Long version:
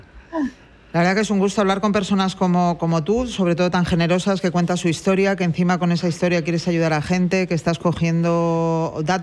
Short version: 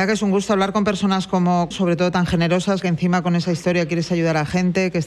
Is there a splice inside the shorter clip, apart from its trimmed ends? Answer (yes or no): yes